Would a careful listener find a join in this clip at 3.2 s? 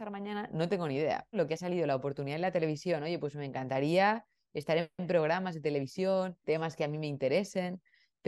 no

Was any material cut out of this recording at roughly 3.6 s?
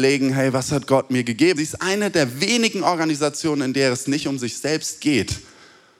no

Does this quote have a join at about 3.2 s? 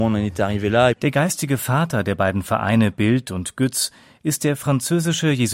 no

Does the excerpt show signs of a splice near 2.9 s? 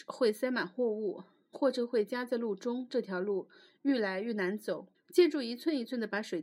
no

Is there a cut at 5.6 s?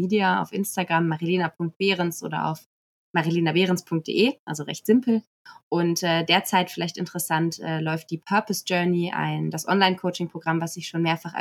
no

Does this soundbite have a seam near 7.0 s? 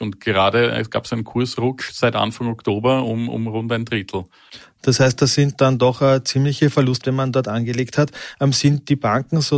yes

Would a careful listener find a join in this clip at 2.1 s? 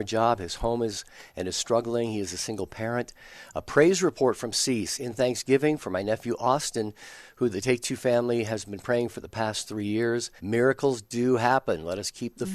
no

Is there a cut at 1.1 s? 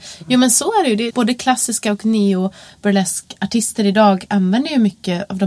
yes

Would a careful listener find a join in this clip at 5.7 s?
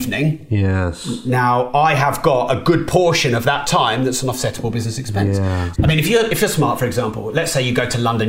yes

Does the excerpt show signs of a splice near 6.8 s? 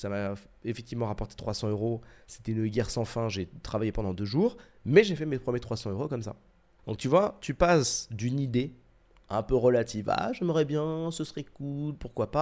yes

